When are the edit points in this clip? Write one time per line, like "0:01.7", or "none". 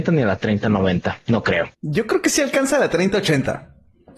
0:01.7